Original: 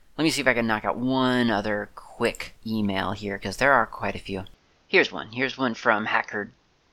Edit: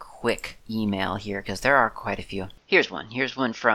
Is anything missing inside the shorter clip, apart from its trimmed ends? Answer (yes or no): yes